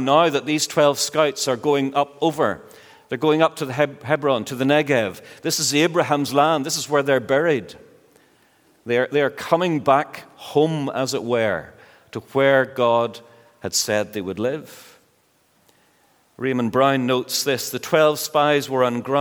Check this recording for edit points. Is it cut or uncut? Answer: uncut